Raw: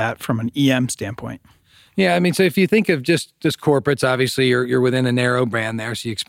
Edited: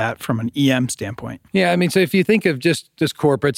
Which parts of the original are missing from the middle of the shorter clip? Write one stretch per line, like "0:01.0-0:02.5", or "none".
0:01.5-0:01.9